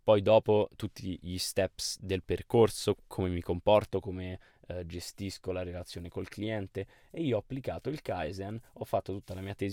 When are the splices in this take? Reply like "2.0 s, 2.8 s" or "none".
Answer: 2.9 s